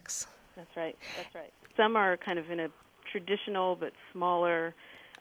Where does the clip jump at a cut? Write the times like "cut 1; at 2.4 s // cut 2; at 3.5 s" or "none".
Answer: cut 1; at 1.7 s